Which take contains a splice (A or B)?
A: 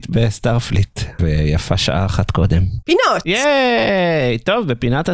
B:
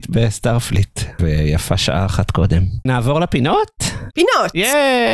A